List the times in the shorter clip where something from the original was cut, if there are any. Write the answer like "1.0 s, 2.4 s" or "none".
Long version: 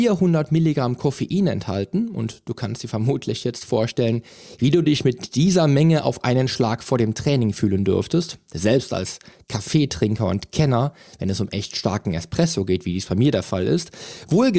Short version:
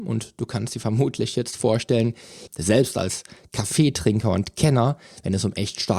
2.5 s